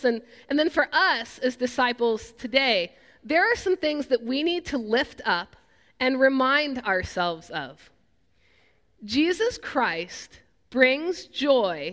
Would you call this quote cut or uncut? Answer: uncut